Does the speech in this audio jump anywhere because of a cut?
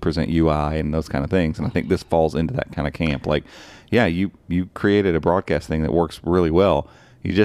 no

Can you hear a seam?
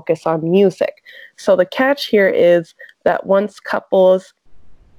no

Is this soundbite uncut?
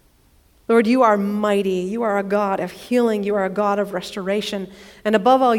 yes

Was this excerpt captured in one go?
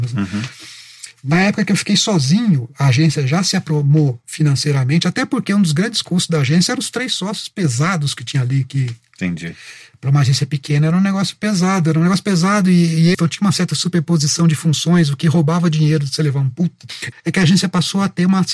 no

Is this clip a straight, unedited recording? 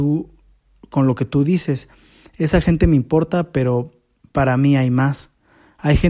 yes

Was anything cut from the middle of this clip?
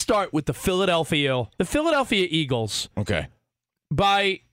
yes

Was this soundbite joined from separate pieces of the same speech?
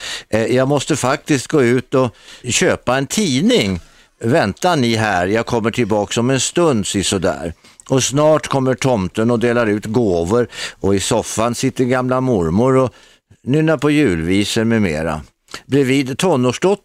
yes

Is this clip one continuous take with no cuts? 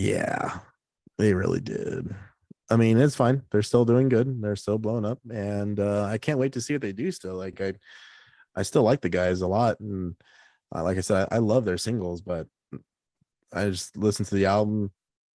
yes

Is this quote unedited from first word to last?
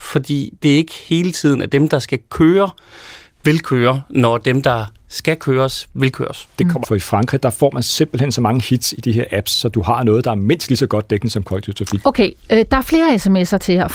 no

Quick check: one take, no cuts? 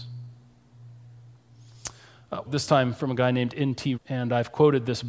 no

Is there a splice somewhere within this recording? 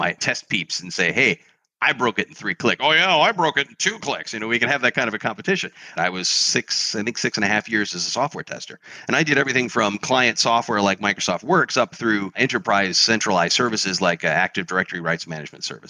yes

